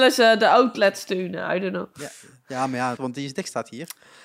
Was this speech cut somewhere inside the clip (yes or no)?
yes